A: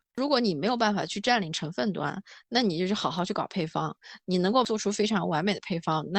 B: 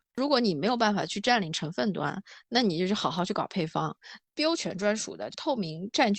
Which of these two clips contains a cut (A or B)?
B